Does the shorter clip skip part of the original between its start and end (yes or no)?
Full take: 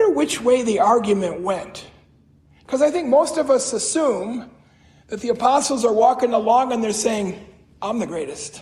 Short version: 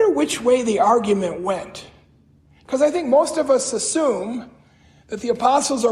no